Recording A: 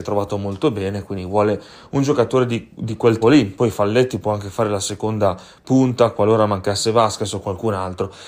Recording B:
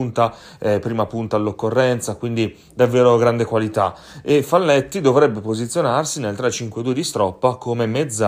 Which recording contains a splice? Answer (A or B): A